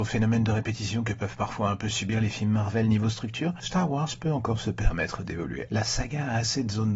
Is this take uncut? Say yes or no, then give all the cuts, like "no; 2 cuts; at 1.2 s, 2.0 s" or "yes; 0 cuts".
no; 1 cut; at 5.7 s